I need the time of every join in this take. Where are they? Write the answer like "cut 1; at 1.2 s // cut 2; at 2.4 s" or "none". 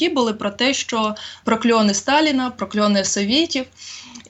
cut 1; at 1.4 s